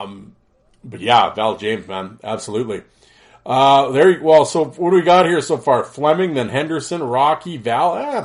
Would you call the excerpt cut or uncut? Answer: uncut